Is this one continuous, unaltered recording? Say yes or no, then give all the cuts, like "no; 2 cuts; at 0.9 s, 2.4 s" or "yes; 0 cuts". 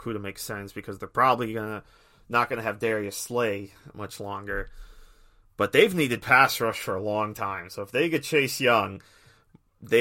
yes; 0 cuts